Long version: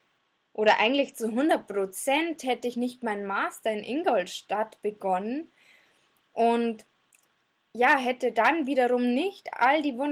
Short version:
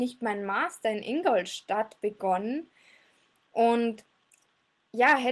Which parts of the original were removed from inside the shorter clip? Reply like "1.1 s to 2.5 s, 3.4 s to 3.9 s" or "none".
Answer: none